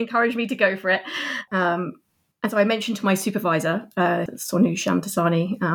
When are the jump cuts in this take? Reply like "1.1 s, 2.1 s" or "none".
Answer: 1.5 s, 4.3 s